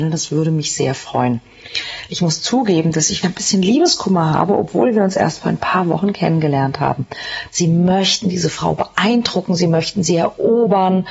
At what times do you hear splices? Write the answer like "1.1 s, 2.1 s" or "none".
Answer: 2.1 s, 3.2 s, 7.5 s